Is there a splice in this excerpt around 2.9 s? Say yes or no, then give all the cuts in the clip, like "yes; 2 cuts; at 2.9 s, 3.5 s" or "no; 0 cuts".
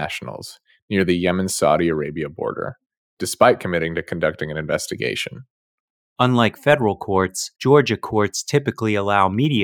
no; 2 cuts; at 6.0 s, 7.6 s